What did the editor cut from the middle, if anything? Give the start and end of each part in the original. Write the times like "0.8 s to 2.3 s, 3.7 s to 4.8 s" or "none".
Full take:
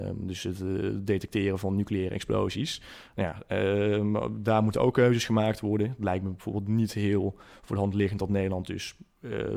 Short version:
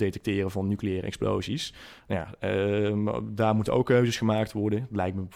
none